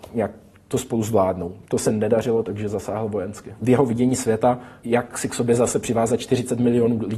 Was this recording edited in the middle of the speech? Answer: yes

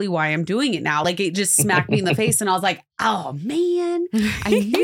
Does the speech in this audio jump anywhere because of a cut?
no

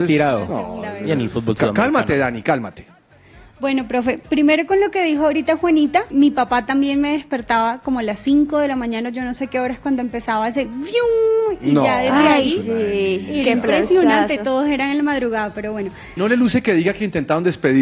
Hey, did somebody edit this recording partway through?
yes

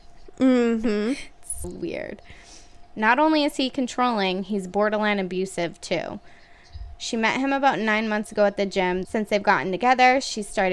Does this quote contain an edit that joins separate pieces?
yes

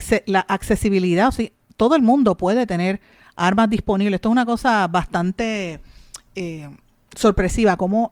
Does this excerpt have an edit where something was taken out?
no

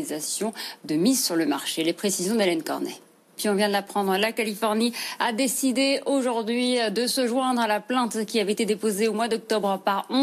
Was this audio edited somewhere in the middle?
yes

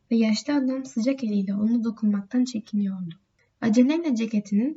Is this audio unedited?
no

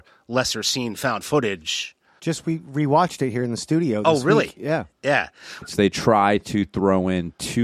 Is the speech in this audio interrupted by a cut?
yes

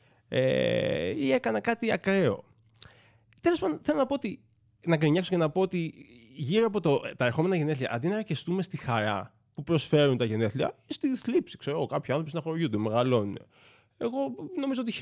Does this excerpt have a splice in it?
no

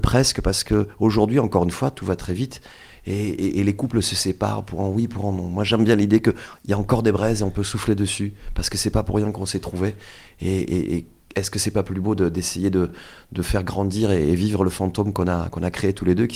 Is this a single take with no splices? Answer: yes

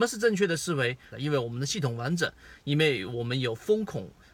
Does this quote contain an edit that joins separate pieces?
yes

